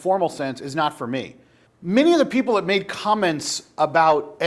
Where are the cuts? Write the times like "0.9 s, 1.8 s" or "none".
1.7 s